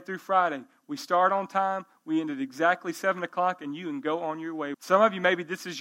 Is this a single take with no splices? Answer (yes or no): no